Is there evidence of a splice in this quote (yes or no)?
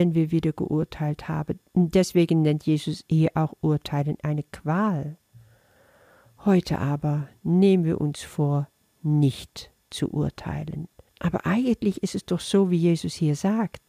yes